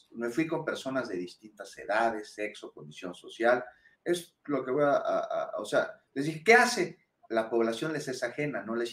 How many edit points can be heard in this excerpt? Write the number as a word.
two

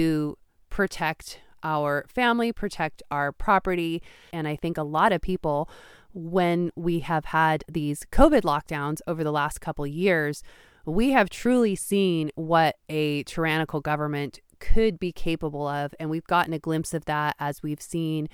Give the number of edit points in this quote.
one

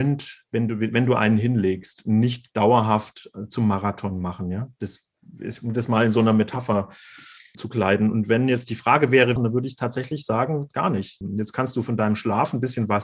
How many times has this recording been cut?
three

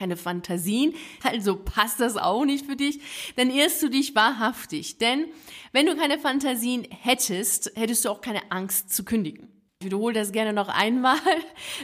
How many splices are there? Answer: one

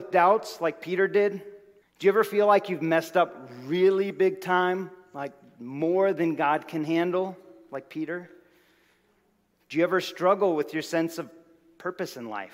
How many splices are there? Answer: one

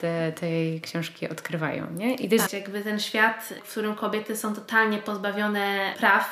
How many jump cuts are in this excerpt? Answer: one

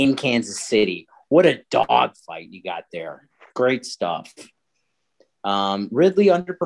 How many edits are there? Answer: one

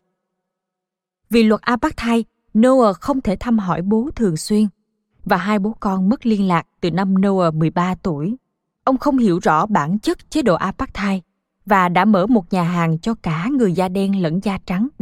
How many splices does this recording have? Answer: one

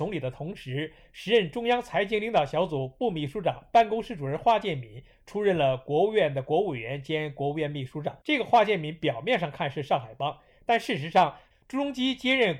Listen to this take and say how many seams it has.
two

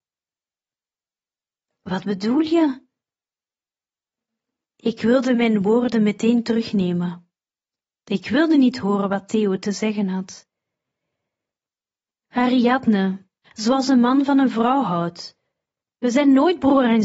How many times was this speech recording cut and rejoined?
one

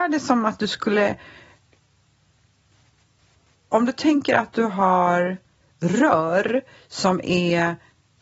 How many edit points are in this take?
zero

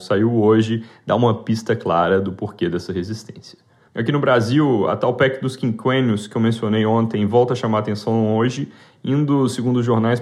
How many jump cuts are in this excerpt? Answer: one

